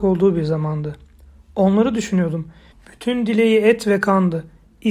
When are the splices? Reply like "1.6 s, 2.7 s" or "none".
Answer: 2.7 s